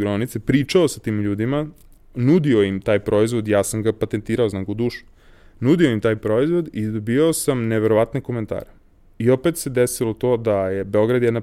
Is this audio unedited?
yes; 0 cuts

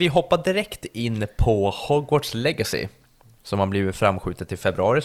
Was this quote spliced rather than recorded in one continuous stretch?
no; 0 cuts

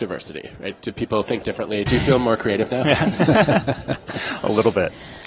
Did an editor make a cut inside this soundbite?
yes; 1 cut; at 1.9 s

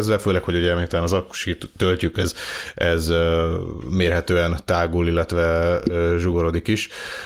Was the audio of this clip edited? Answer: yes; 1 cut; at 2.1 s

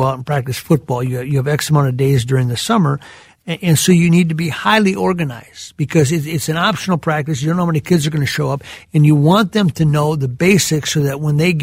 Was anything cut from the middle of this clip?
no; 0 cuts

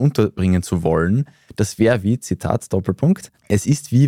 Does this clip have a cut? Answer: no; 0 cuts

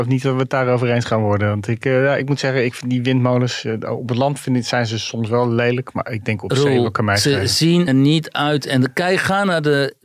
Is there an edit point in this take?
yes; 1 cut; at 7.9 s

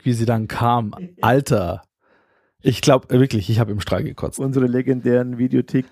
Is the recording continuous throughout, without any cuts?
yes; 0 cuts

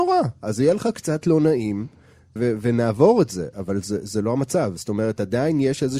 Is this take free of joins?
no; 1 cut; at 2.4 s

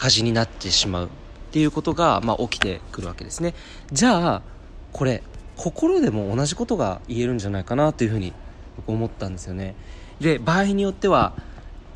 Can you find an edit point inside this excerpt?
yes; 2 cuts; at 3.9 s, 10.2 s

